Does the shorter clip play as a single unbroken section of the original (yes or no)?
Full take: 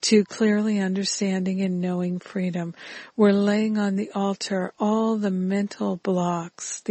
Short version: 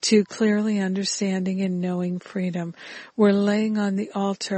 yes